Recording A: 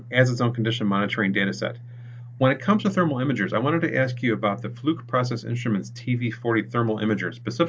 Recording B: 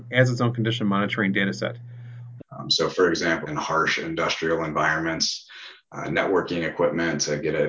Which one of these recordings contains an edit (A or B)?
B